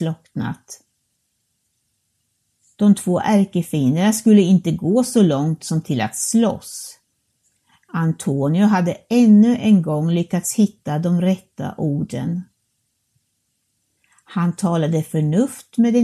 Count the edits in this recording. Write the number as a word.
zero